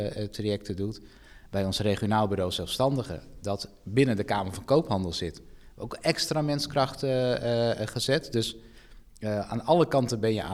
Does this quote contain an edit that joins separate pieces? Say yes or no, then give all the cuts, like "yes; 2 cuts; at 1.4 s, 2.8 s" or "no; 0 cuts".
no; 0 cuts